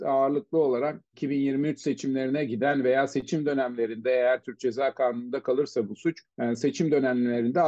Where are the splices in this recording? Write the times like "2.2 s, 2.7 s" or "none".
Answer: 6.3 s